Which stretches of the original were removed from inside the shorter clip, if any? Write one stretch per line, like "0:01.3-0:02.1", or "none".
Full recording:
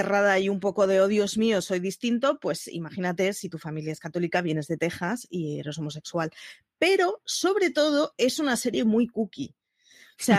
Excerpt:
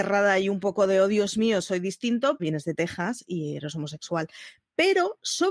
0:02.4-0:04.4